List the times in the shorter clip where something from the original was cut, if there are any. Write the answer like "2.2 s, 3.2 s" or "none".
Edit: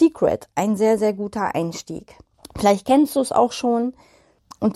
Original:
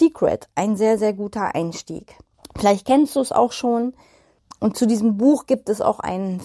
none